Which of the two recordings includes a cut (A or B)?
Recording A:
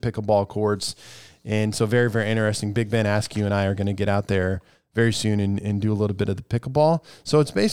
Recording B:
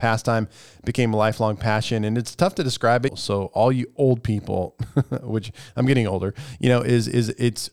B